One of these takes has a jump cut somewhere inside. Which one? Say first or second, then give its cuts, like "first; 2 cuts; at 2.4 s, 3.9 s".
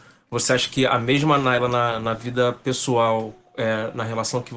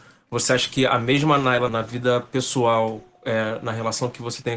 second; 1 cut; at 1.7 s